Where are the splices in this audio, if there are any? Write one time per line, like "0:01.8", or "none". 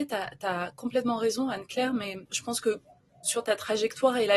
0:02.3